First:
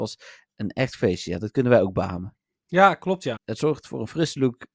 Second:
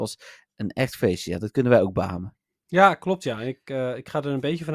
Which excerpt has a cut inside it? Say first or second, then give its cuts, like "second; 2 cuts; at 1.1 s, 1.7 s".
first; 1 cut; at 3.4 s